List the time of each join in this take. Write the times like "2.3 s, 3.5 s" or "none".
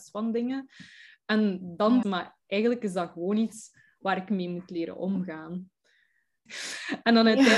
2.0 s, 6.5 s